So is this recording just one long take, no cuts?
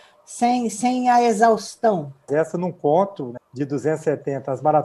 no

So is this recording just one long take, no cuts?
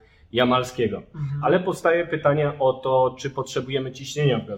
yes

